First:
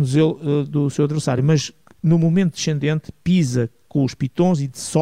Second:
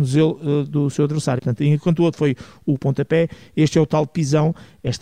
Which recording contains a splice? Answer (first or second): second